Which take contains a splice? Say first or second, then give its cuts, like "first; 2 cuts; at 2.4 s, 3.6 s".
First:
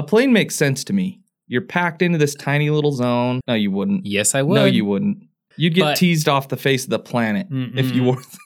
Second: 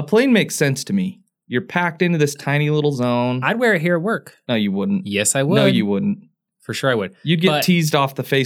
first; 2 cuts; at 3.4 s, 5.5 s